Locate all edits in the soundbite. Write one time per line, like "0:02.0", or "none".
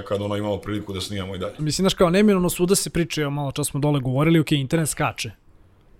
0:01.6